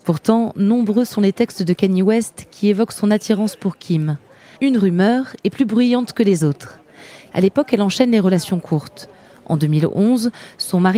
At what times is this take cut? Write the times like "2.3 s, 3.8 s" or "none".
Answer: 4.6 s, 7.3 s